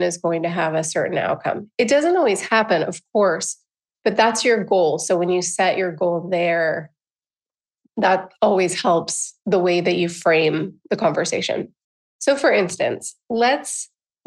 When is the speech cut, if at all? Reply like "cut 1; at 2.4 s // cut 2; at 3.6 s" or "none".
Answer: none